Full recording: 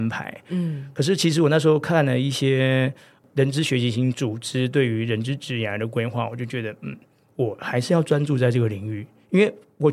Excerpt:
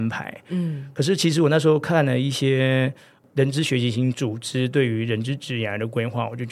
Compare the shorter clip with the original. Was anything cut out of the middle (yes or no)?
no